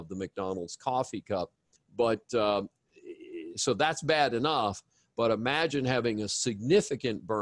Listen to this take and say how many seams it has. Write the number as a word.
one